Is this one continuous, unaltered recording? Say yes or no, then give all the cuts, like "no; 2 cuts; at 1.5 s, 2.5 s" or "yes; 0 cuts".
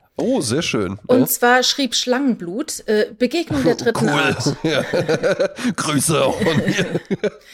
yes; 0 cuts